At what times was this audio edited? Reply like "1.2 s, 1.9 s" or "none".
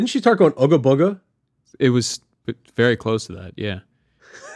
none